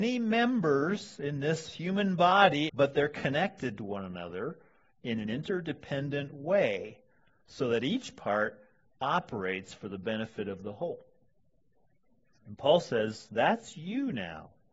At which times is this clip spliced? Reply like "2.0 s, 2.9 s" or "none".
2.7 s